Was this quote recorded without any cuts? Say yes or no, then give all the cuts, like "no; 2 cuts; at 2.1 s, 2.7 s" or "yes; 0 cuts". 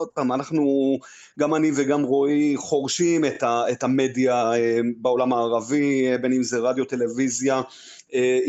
yes; 0 cuts